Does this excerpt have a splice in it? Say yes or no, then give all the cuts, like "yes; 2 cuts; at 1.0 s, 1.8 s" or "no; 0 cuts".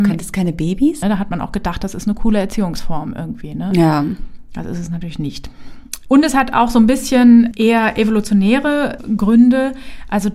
yes; 1 cut; at 1.0 s